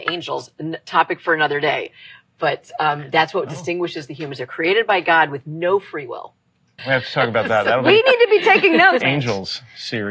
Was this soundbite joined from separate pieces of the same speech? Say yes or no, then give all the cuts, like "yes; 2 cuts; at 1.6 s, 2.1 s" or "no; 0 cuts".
yes; 2 cuts; at 6.8 s, 9.0 s